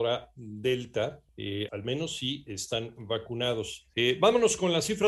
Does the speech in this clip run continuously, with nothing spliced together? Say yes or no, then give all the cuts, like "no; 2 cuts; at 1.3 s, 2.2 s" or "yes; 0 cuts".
no; 1 cut; at 1.7 s